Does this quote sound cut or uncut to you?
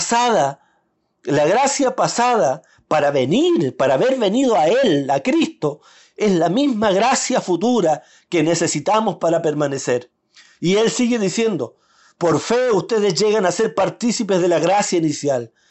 uncut